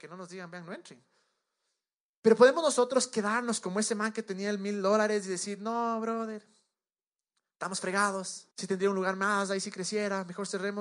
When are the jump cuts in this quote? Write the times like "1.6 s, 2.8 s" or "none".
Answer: 8.5 s